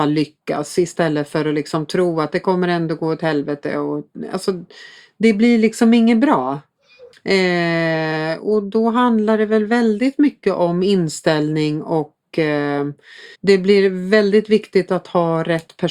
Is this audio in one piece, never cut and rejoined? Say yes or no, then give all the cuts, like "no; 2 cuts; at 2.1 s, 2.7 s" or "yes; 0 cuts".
no; 2 cuts; at 7.1 s, 13.3 s